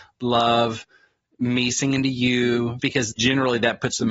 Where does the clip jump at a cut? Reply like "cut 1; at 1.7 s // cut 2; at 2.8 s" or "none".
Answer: cut 1; at 2.8 s